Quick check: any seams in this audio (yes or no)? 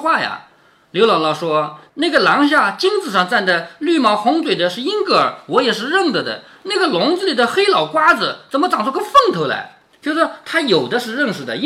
no